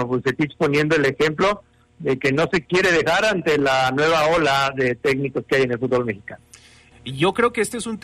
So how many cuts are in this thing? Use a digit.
1